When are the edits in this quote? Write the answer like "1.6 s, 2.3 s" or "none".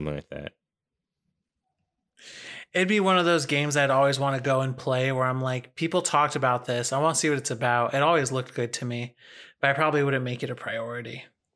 none

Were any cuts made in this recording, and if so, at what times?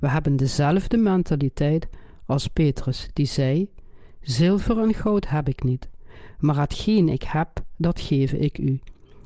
none

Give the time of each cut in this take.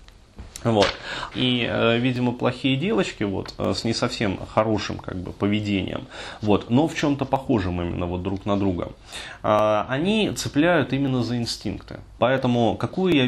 1.3 s, 12.2 s

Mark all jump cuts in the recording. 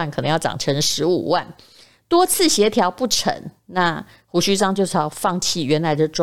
none

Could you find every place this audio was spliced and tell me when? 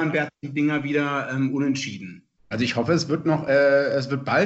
2.5 s

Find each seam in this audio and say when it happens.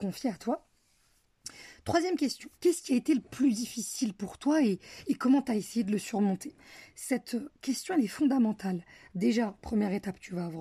2.5 s

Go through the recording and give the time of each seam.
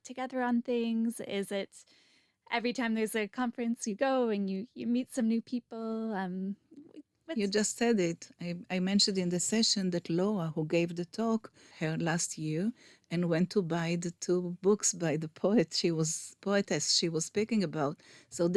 11.7 s

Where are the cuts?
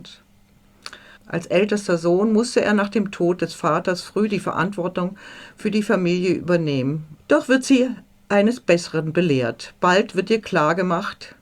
1.2 s, 7.2 s

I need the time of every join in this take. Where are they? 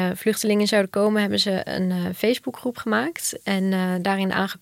none

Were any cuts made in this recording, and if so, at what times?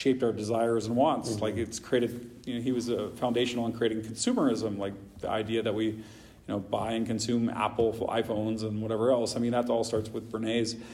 none

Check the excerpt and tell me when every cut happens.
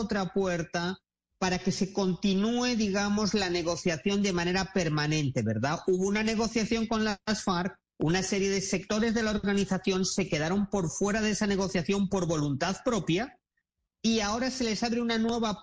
none

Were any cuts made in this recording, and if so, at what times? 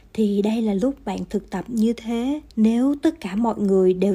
2.5 s

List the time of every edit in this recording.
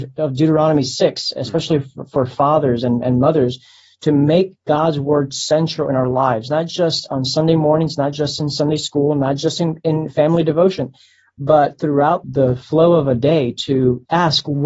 none

